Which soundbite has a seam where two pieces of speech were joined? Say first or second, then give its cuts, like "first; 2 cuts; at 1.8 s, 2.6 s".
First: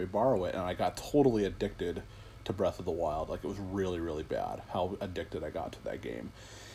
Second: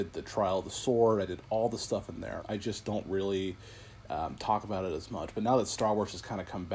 second; 1 cut; at 2.4 s